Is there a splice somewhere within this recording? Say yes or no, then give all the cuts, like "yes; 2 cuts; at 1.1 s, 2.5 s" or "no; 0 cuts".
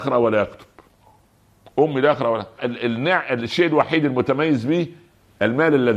yes; 1 cut; at 2.6 s